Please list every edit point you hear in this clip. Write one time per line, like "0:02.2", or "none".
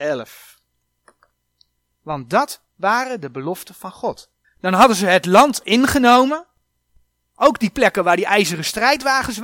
0:01.8
0:04.4

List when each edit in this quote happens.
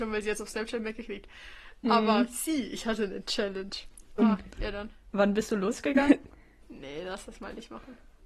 0:04.2
0:06.6

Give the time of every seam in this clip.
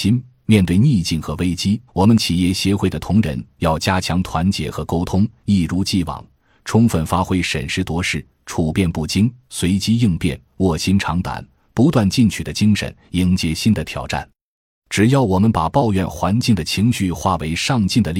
0:01.9

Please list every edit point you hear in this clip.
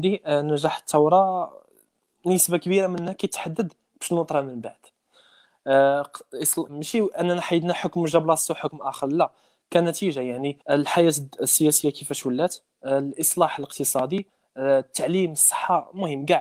0:06.7
0:10.6

